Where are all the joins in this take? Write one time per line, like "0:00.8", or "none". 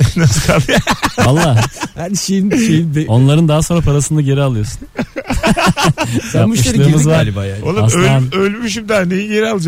none